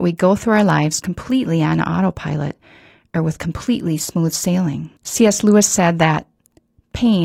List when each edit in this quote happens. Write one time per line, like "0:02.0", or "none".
0:05.0